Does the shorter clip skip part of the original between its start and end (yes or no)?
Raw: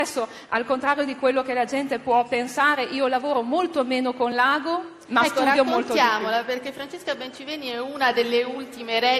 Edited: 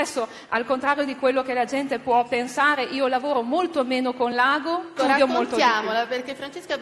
yes